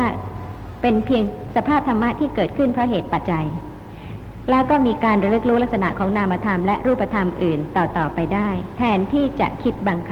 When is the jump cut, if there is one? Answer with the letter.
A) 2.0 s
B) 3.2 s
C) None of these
B